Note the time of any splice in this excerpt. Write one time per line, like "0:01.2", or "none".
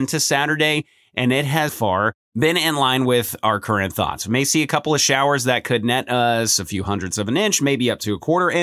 0:01.7